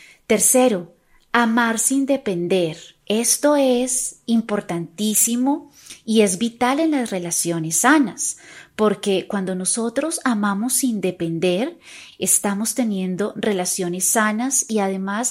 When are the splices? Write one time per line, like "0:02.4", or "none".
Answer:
0:03.0
0:12.1